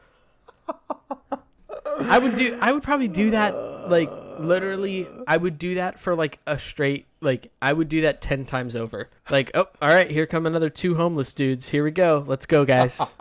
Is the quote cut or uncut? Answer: cut